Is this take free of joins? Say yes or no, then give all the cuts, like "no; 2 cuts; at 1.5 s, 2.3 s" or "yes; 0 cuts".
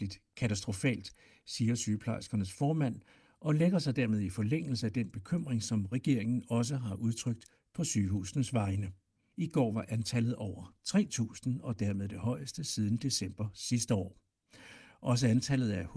no; 1 cut; at 9.3 s